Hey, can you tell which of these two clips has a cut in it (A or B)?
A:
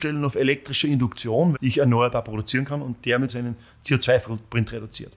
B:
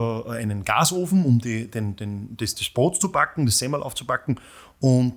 A